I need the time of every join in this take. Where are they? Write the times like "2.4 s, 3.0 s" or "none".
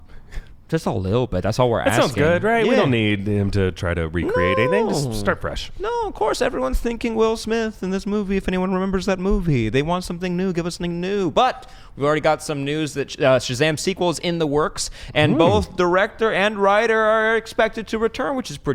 none